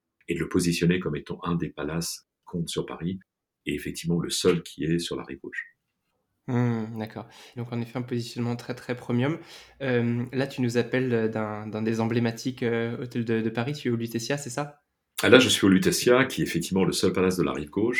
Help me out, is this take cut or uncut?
cut